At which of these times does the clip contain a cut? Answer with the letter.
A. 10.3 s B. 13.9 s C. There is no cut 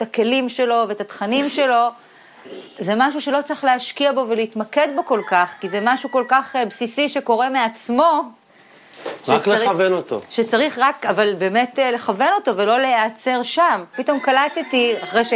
B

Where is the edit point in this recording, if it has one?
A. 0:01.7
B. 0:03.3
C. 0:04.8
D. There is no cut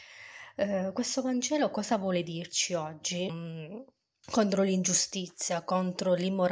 B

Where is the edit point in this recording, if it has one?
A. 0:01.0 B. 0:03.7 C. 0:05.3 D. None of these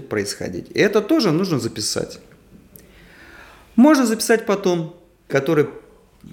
C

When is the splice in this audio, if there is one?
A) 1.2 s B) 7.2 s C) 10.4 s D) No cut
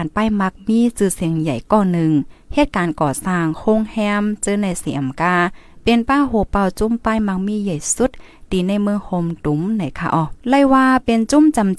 C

